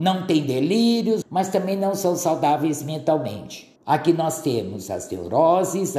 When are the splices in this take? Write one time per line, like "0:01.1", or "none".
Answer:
0:01.2
0:03.8